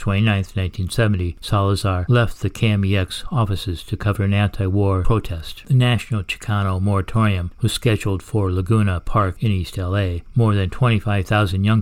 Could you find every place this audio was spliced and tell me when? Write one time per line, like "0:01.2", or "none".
none